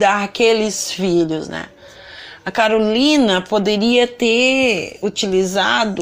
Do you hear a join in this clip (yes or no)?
no